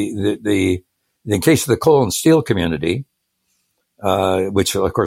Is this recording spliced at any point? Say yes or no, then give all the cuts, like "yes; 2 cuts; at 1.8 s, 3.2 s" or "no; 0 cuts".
no; 0 cuts